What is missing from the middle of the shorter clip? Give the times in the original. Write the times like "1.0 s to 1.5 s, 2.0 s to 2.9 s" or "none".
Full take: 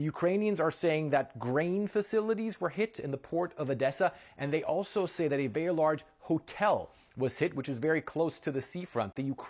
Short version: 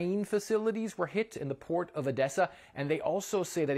none

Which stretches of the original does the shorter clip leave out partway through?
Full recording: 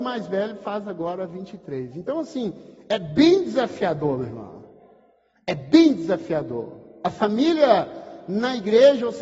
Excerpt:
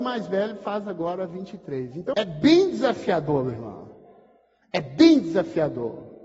2.1 s to 2.9 s

